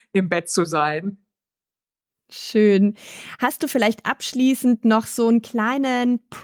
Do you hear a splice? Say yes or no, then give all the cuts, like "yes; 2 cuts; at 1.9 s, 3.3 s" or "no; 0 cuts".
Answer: no; 0 cuts